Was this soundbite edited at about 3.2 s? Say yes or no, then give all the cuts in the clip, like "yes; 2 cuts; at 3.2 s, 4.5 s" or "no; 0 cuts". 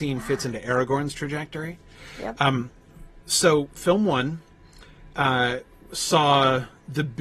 no; 0 cuts